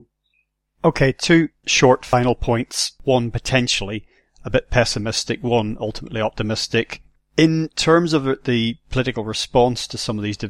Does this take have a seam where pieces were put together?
no; 0 cuts

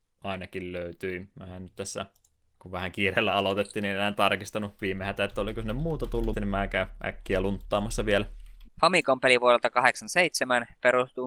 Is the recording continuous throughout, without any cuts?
no; 2 cuts; at 6.3 s, 8.7 s

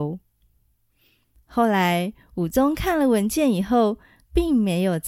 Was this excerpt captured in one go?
yes; 0 cuts

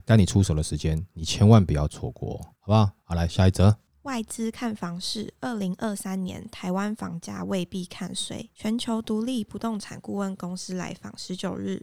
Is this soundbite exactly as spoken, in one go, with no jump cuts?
yes; 0 cuts

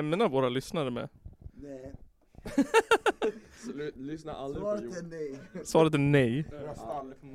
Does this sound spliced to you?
no; 0 cuts

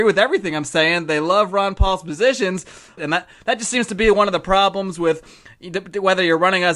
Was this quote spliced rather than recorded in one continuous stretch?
yes; 1 cut; at 3.0 s

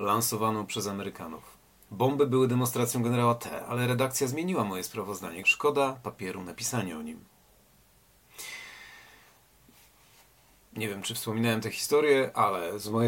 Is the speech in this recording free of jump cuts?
no; 2 cuts; at 1.9 s, 5.4 s

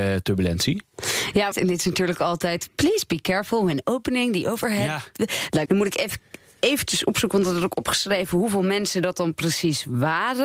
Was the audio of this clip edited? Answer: yes; 2 cuts; at 1.5 s, 5.7 s

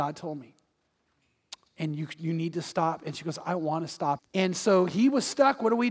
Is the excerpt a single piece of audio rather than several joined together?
no; 1 cut; at 4.2 s

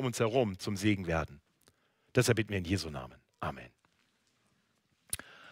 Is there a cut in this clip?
no; 0 cuts

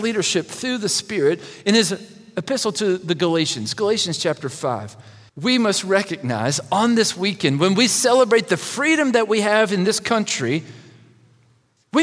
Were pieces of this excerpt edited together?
yes; 1 cut; at 5.3 s

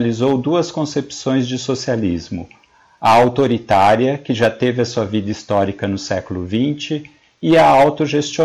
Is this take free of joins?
yes; 0 cuts

